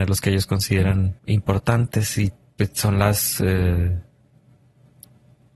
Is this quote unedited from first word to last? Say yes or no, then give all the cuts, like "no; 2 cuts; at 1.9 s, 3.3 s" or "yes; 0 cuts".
no; 1 cut; at 1.2 s